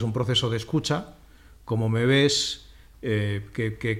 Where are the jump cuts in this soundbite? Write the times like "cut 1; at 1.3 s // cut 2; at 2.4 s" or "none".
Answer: none